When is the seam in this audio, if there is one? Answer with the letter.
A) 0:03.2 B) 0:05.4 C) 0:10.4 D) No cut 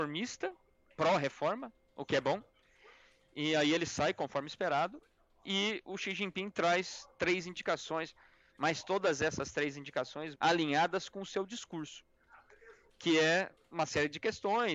C